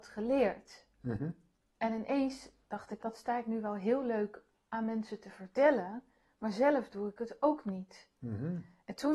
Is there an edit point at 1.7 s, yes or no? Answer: no